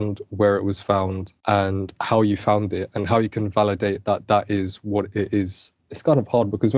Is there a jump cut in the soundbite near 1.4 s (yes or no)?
no